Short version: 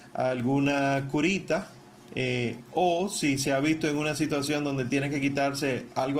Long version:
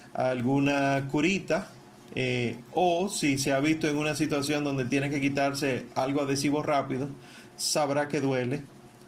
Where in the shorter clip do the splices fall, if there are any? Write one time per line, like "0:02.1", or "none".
none